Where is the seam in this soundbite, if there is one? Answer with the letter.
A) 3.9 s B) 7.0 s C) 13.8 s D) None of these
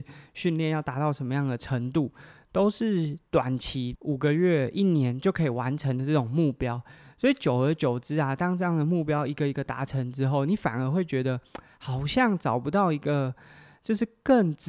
A